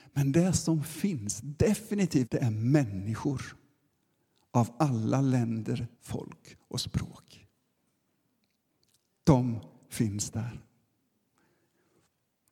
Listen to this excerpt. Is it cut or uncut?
cut